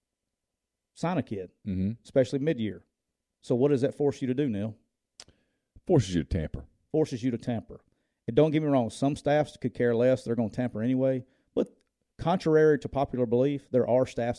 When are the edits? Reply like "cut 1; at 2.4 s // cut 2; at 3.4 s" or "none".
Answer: none